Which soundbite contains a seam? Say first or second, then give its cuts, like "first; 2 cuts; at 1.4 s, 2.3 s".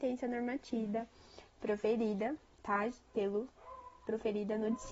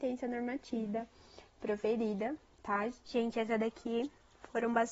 second; 1 cut; at 3.1 s